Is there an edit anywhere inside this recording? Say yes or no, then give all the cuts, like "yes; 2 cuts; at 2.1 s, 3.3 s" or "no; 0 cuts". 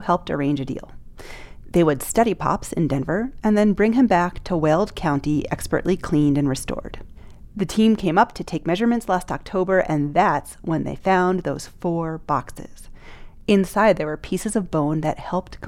no; 0 cuts